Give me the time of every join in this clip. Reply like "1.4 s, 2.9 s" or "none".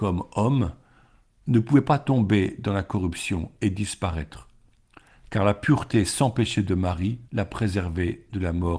7.3 s